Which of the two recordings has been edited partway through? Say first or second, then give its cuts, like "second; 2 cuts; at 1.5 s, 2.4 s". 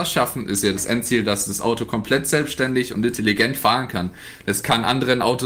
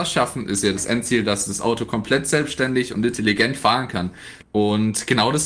second; 1 cut; at 4.4 s